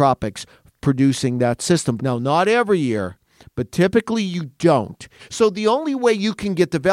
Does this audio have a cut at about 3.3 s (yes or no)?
no